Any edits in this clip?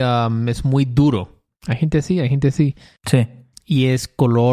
yes; 2 cuts; at 1.5 s, 3.0 s

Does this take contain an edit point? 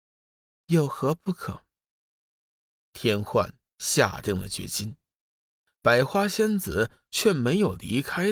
yes; 1 cut; at 2.2 s

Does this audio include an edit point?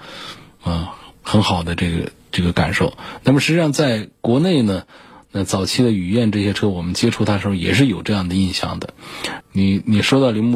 yes; 1 cut; at 9.4 s

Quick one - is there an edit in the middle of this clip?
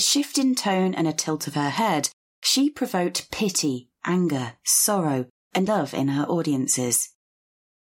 yes; 1 cut; at 5.7 s

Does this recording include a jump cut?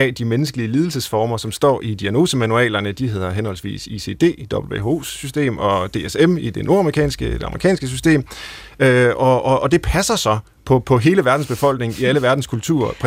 no; 0 cuts

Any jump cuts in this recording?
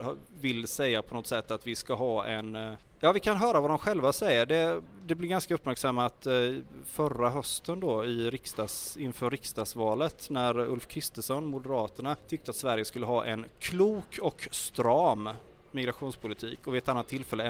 no; 0 cuts

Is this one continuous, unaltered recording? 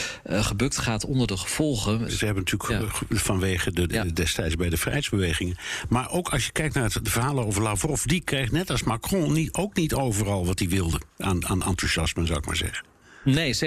no; 2 cuts; at 2.1 s, 3.9 s

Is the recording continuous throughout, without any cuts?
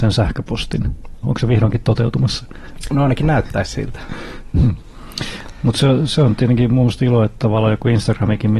no; 2 cuts; at 1.2 s, 4.5 s

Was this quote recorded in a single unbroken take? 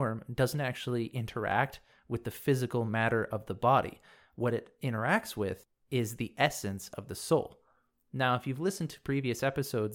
yes; 0 cuts

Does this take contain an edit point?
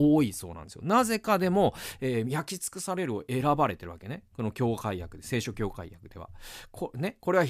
no; 0 cuts

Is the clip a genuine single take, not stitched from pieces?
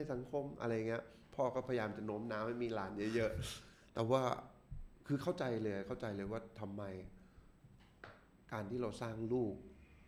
yes; 0 cuts

